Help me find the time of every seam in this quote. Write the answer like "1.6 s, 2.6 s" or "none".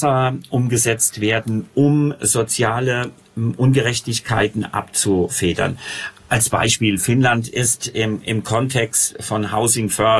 none